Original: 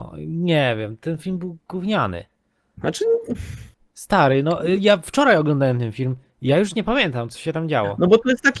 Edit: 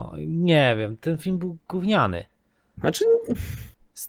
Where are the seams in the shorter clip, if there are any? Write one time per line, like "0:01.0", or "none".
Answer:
none